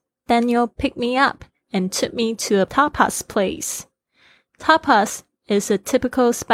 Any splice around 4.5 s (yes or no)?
no